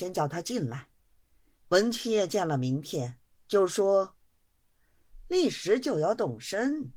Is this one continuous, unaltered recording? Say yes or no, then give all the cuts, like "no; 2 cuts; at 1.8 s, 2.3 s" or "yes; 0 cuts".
no; 1 cut; at 1.6 s